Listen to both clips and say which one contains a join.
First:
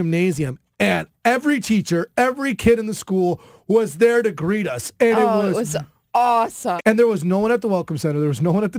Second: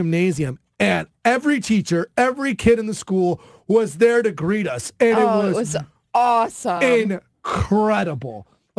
first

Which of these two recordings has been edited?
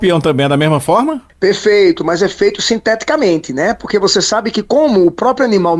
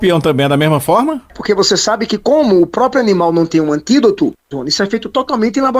second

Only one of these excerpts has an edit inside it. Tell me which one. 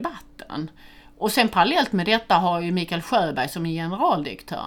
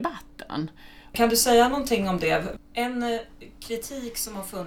second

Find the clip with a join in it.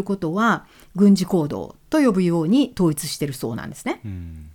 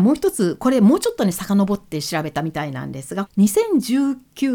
second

